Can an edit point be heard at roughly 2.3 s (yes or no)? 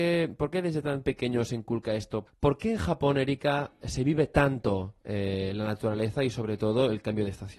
yes